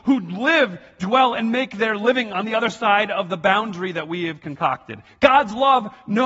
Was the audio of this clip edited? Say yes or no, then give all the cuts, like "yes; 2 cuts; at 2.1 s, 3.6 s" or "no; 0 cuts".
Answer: no; 0 cuts